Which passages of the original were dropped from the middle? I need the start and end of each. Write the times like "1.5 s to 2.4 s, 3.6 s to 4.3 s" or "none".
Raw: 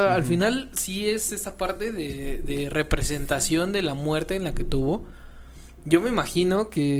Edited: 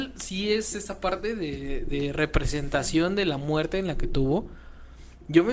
none